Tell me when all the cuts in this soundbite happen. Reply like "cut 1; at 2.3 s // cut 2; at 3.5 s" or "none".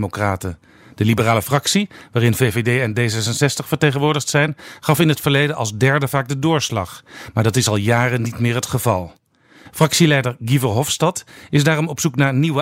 none

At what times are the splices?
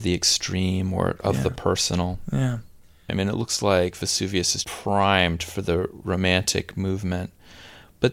cut 1; at 3.1 s // cut 2; at 4.6 s

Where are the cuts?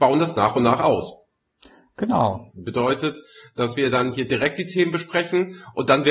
cut 1; at 2.5 s

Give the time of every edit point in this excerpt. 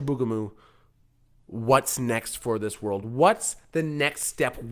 none

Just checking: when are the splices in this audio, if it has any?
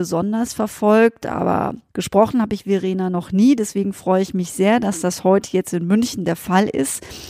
cut 1; at 1.9 s

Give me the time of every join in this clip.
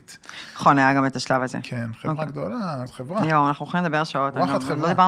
cut 1; at 1.6 s // cut 2; at 2.9 s

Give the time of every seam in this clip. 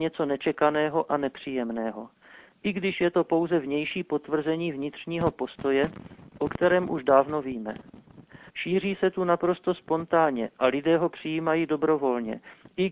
cut 1; at 8.5 s

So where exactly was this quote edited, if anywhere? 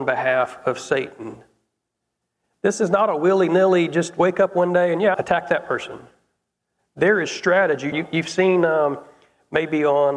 cut 1; at 5.1 s // cut 2; at 7.9 s

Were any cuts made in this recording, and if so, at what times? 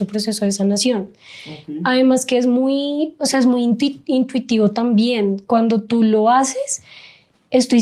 none

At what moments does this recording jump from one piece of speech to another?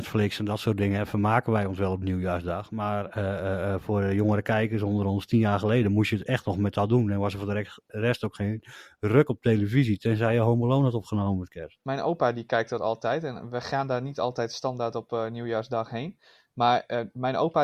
none

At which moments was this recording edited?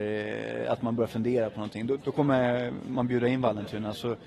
cut 1; at 2.0 s

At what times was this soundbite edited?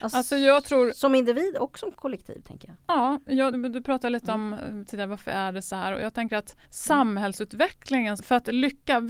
cut 1; at 3.5 s // cut 2; at 6.6 s // cut 3; at 8.2 s

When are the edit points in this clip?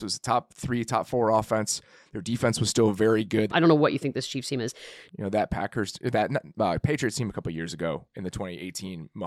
cut 1; at 3.5 s // cut 2; at 5.1 s

